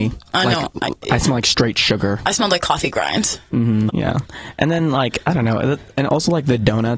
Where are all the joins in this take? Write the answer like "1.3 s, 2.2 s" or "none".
3.9 s